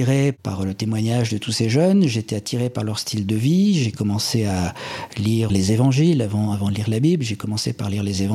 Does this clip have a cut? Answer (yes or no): yes